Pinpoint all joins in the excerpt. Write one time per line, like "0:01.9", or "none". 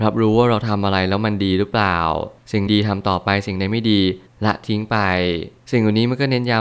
0:02.7